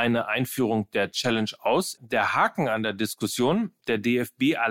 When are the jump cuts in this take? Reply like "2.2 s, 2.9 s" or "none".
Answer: 2.0 s